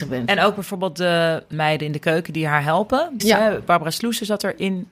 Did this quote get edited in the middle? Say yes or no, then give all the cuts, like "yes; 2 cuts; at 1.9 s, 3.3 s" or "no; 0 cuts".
yes; 2 cuts; at 1.5 s, 3.2 s